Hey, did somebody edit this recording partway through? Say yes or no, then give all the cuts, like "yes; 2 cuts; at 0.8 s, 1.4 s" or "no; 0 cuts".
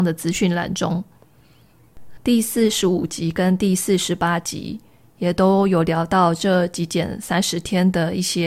yes; 1 cut; at 2.2 s